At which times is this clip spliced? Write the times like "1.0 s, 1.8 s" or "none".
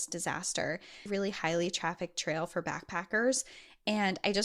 1.1 s